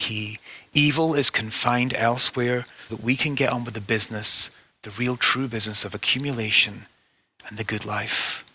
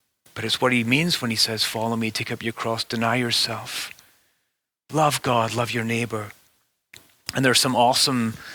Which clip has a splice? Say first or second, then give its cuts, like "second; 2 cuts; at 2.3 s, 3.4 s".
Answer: first; 1 cut; at 2.9 s